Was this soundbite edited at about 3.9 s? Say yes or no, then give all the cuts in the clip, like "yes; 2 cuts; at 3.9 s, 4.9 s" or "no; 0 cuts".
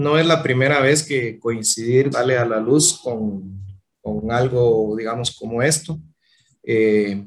no; 1 cut; at 2.1 s